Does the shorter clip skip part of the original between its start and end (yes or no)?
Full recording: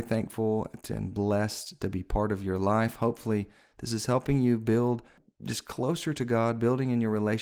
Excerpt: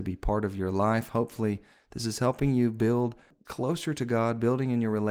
yes